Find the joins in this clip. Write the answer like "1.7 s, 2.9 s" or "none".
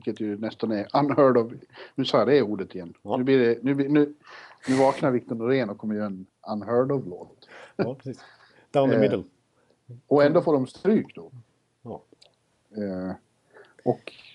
none